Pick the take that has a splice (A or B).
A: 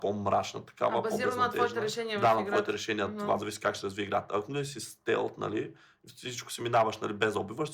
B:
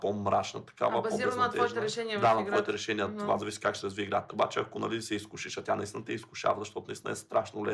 B